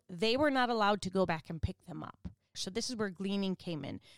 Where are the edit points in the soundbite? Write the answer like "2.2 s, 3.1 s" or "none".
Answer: 2.5 s

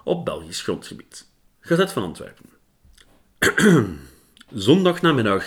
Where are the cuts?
1.5 s

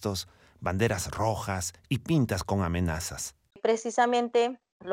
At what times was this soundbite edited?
3.5 s

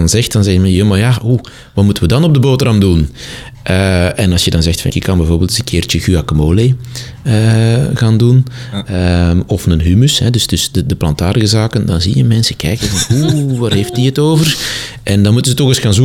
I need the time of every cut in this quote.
4.9 s

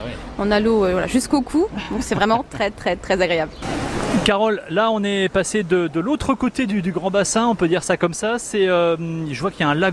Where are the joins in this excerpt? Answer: none

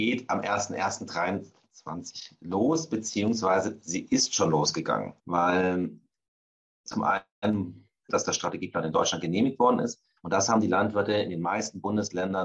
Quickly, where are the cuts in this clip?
5.2 s, 8.1 s, 10.2 s

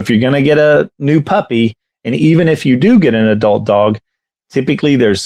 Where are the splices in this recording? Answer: none

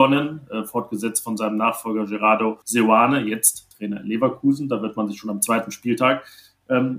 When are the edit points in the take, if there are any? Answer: 2.6 s

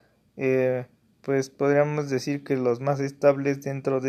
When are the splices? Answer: none

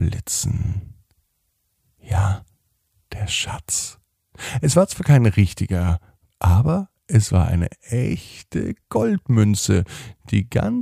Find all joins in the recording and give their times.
2.9 s, 6.3 s

